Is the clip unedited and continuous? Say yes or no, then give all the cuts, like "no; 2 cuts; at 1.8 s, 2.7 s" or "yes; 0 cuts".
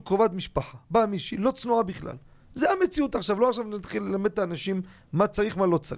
yes; 0 cuts